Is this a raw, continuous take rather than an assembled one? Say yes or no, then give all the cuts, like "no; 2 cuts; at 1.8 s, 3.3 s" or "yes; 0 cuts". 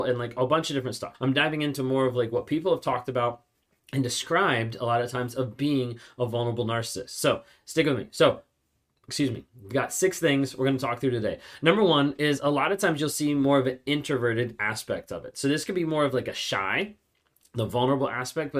no; 1 cut; at 1.1 s